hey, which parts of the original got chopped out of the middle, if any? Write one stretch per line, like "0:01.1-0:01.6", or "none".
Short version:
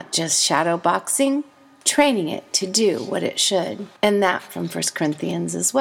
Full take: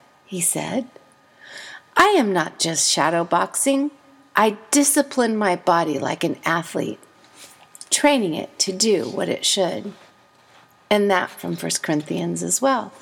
0:04.3-0:07.9
0:10.0-0:10.8